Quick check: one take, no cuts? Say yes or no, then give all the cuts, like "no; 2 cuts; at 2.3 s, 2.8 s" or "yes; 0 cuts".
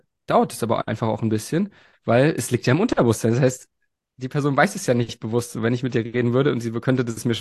yes; 0 cuts